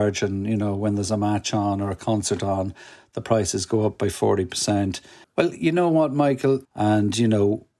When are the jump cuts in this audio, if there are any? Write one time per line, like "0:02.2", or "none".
0:05.2
0:06.6